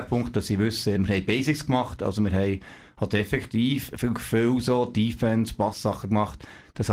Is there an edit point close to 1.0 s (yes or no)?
yes